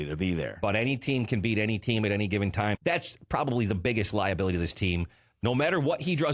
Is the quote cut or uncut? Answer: cut